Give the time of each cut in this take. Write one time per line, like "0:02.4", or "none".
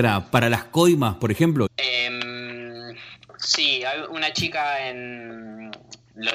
0:01.7